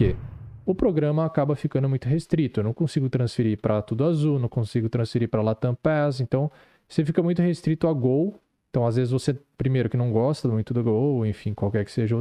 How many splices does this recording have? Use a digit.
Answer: 0